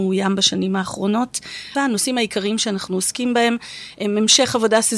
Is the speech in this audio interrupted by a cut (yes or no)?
yes